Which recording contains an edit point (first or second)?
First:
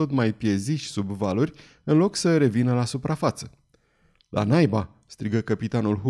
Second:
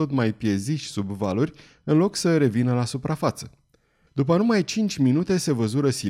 second